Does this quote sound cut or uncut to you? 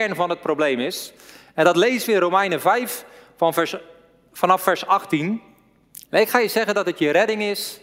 cut